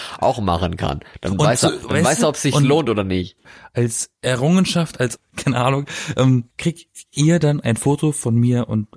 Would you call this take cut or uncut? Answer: cut